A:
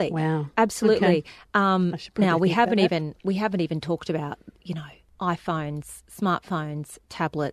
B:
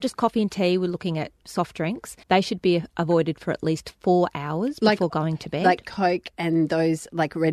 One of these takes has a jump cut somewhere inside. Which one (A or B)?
B